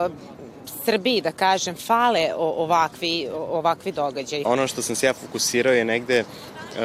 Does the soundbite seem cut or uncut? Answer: cut